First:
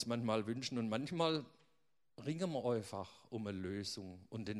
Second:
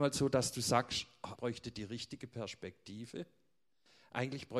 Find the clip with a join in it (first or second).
second